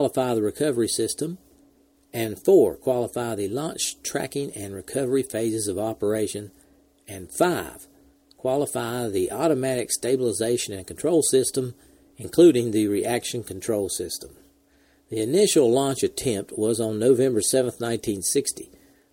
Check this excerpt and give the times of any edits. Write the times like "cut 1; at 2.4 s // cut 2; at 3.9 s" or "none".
none